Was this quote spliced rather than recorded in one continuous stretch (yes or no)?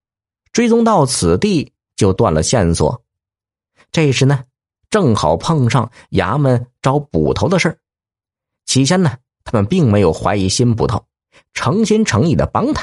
no